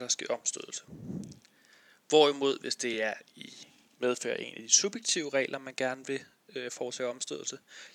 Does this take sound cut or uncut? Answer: uncut